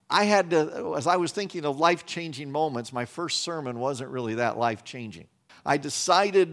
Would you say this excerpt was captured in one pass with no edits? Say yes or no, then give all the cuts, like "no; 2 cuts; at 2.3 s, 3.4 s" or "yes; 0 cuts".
no; 1 cut; at 5.5 s